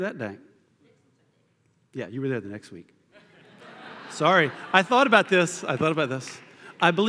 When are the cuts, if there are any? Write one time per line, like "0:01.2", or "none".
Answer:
none